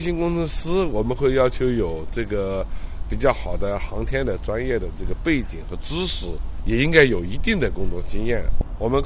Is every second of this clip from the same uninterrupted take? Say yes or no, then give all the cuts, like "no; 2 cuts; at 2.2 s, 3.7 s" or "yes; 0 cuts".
yes; 0 cuts